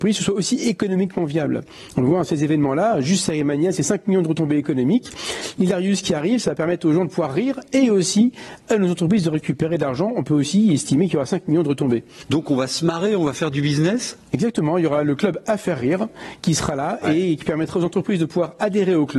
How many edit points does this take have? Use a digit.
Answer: 1